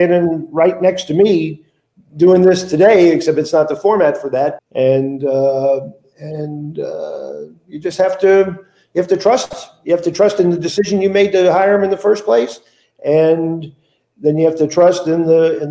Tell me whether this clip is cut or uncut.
cut